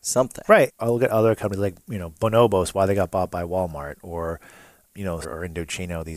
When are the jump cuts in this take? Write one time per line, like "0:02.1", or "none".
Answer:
0:05.2